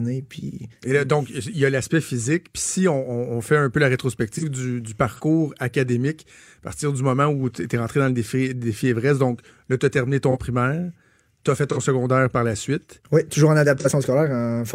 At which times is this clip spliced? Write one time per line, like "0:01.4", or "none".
none